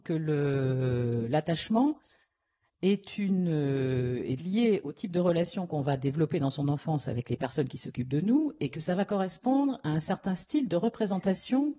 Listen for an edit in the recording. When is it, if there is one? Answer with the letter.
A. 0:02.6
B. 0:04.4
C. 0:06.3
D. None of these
B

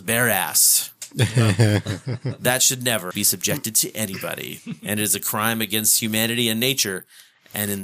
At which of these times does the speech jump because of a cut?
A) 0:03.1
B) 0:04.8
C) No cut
A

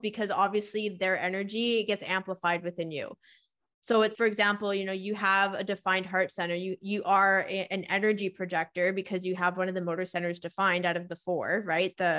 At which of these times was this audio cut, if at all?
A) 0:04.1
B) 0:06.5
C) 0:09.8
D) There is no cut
A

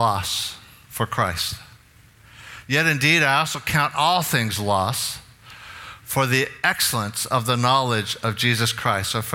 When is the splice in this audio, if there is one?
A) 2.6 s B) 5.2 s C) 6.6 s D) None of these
D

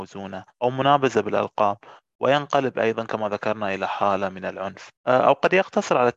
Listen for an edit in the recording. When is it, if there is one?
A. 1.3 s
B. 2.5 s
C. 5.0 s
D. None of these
C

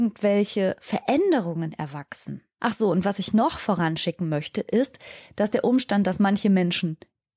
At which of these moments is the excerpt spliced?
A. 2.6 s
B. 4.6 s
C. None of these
A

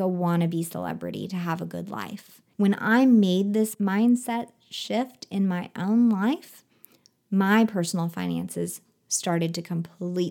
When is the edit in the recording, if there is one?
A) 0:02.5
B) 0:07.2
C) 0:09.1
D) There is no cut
A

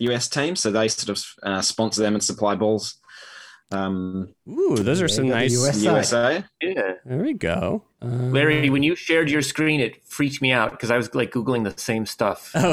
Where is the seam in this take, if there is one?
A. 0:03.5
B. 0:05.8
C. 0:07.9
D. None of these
C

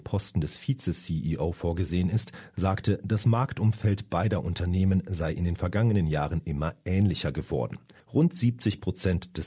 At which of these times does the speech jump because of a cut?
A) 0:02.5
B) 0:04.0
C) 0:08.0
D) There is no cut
C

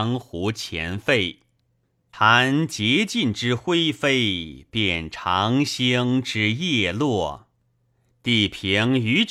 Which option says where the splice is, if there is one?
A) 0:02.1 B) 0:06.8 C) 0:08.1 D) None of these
A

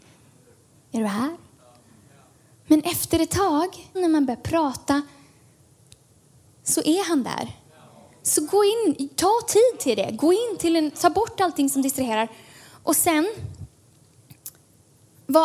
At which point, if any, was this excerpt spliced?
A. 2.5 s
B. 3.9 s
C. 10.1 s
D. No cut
B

